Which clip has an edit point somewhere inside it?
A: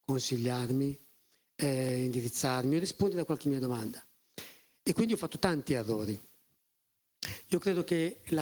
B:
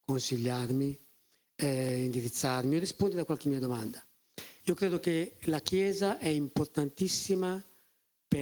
B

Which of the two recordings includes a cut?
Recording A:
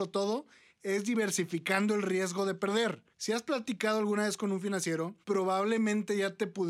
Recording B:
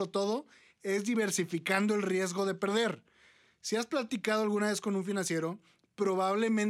A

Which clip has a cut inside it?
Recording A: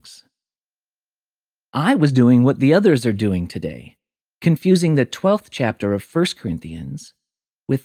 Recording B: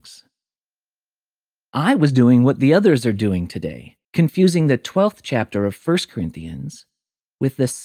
B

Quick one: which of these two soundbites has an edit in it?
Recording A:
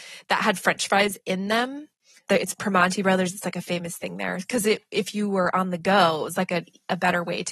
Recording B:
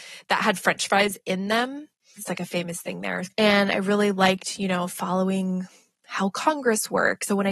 B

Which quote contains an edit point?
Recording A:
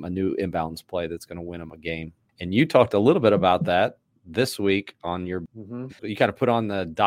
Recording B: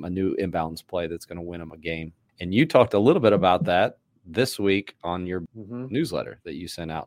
A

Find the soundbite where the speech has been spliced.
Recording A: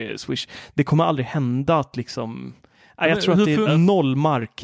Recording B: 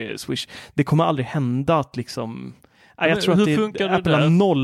A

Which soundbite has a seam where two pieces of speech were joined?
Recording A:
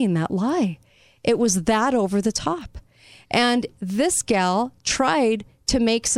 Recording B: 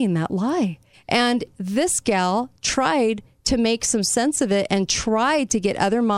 B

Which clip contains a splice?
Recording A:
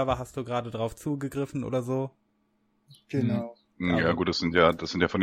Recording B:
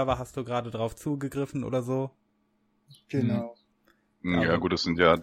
A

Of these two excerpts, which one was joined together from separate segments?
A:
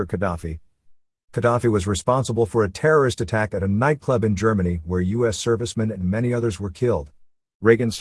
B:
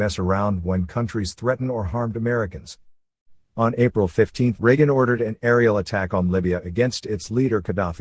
B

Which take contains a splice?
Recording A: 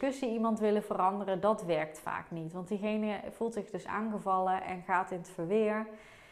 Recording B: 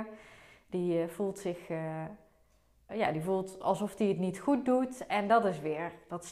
B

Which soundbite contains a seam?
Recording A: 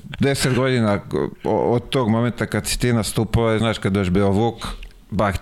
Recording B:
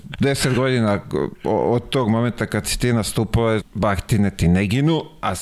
B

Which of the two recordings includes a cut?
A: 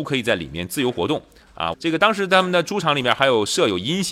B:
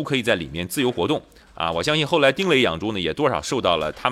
A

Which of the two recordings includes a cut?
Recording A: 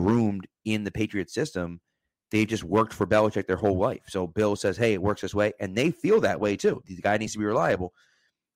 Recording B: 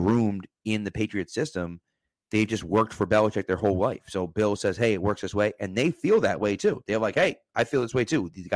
A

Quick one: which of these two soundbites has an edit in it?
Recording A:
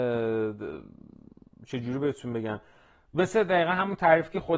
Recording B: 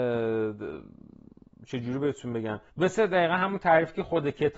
B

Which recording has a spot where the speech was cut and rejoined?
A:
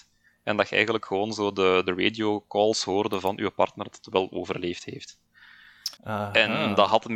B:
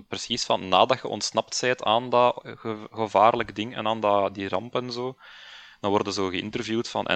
A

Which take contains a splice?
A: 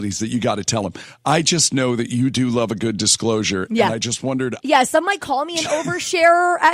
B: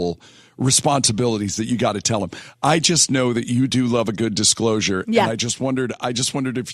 A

